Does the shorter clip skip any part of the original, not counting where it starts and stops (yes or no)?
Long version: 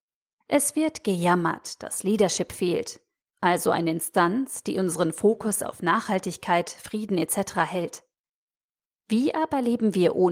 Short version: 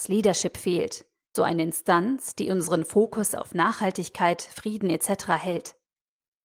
yes